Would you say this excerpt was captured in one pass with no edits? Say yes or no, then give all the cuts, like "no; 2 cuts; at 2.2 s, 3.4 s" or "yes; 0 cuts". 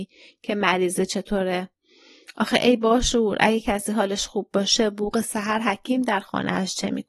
yes; 0 cuts